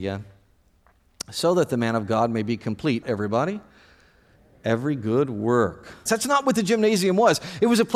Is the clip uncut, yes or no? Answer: no